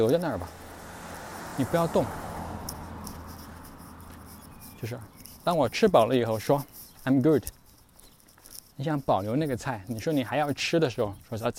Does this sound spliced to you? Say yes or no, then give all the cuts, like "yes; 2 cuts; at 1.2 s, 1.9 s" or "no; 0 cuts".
no; 0 cuts